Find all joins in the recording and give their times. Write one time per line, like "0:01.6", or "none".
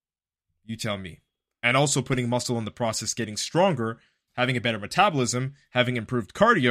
none